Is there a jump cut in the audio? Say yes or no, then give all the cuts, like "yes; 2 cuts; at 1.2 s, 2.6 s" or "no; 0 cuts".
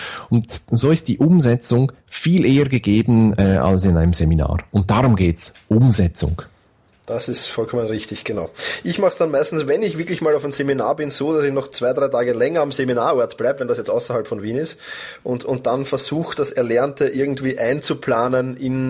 no; 0 cuts